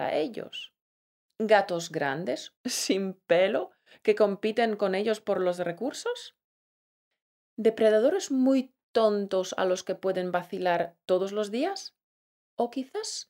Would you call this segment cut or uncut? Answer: cut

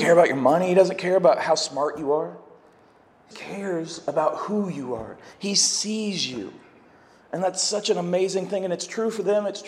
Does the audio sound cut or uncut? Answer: cut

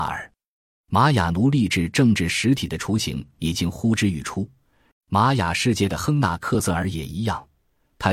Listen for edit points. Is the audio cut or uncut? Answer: cut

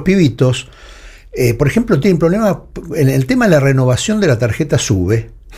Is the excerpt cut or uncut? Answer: uncut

